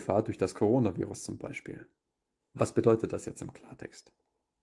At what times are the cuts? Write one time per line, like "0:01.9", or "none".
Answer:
0:02.4